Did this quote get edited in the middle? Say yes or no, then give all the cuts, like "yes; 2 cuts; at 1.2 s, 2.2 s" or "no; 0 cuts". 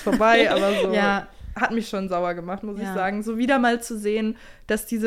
no; 0 cuts